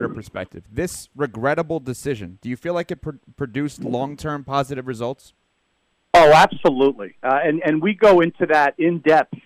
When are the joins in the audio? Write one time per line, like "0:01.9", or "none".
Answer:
none